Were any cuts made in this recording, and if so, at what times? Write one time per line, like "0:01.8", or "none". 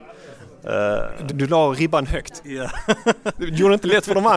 0:01.3